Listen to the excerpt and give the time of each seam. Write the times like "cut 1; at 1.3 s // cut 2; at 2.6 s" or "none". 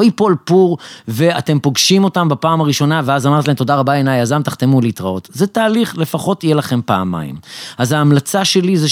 none

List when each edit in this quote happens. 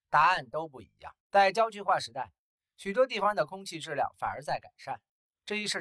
cut 1; at 1.2 s

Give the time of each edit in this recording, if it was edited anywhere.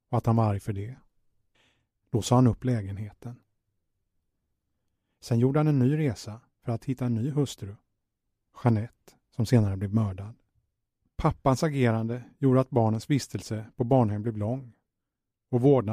cut 1; at 2.0 s

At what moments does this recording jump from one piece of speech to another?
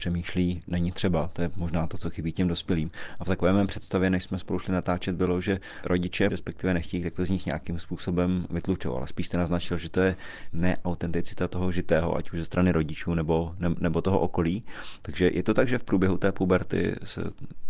cut 1; at 6.3 s

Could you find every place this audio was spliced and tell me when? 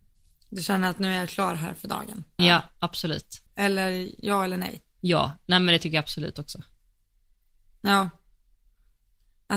cut 1; at 2.4 s // cut 2; at 3.5 s

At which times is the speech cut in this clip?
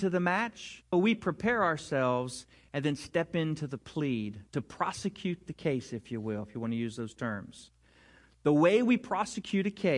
cut 1; at 0.9 s

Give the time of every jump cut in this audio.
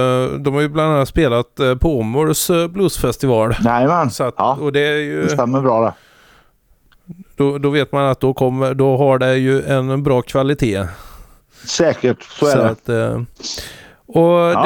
none

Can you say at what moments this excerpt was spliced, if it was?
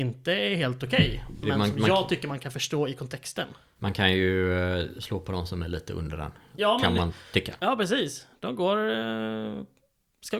cut 1; at 7.6 s

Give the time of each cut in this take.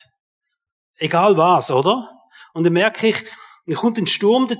none

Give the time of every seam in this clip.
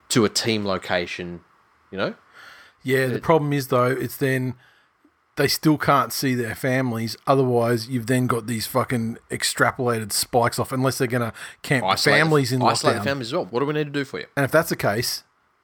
cut 1; at 13.5 s

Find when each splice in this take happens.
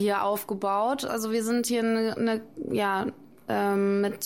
cut 1; at 1.1 s

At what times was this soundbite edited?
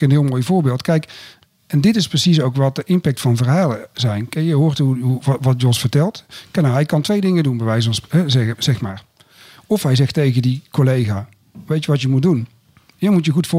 none

